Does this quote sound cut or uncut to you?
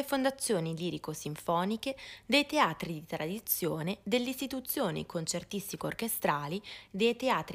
uncut